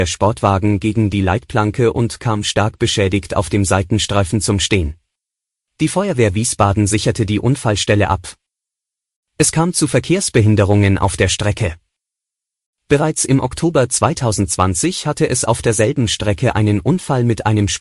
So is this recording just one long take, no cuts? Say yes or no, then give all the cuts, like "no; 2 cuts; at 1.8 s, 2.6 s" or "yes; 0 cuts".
no; 1 cut; at 5.6 s